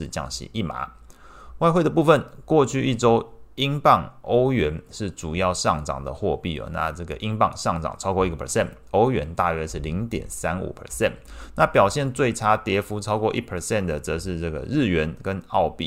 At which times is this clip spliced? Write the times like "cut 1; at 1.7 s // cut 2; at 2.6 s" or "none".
none